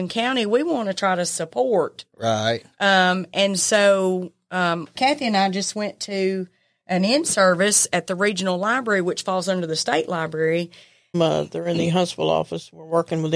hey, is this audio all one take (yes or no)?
no